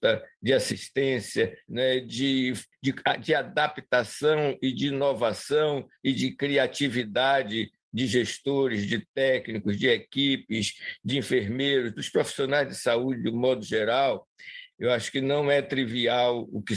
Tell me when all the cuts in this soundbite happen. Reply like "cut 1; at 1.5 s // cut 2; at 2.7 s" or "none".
cut 1; at 1.7 s // cut 2; at 14.7 s